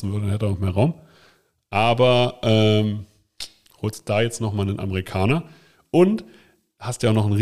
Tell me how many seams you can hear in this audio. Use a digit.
0